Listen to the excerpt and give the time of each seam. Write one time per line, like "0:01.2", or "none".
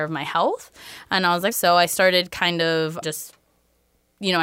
0:01.5
0:03.0

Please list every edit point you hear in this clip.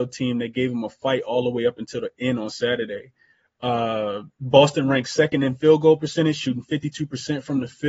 none

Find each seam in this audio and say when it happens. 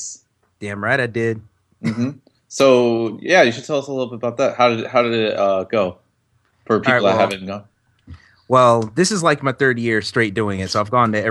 none

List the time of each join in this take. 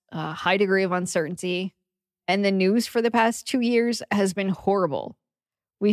none

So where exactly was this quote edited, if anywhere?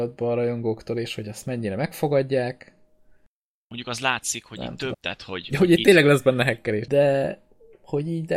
0:04.9
0:06.9

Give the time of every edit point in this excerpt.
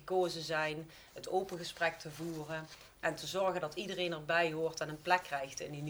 none

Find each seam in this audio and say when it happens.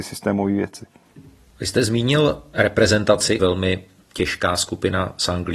0:03.4

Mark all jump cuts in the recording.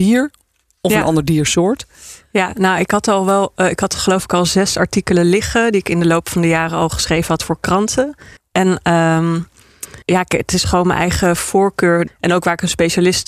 0:08.4
0:10.0
0:12.1

